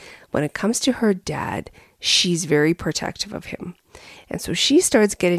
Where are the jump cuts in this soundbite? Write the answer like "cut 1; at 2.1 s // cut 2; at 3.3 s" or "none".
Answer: none